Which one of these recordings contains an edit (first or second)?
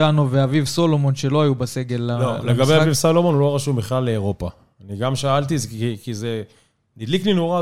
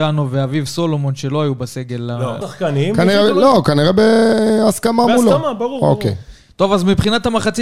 second